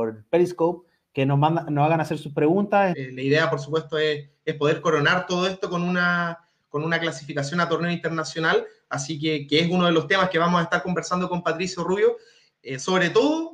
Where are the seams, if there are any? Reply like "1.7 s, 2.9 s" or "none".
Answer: 2.9 s, 12.5 s